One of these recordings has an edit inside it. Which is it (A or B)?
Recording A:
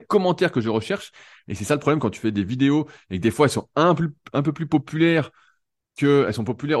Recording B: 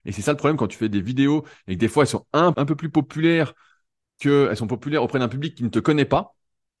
B